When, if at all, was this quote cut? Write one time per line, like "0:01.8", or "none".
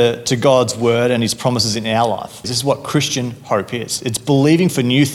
0:02.4

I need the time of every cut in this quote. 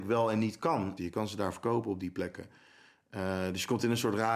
0:01.0

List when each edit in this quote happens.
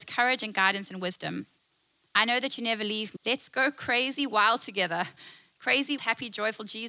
0:03.2
0:06.0

